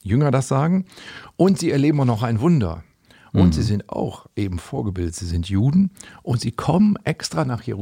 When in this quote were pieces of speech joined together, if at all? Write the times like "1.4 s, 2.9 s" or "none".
none